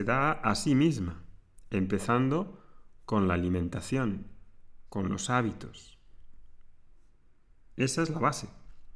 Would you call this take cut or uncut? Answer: cut